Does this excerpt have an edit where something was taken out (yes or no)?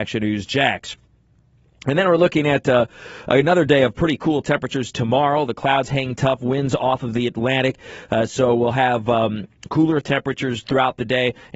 no